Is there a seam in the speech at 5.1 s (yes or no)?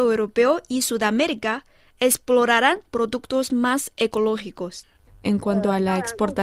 yes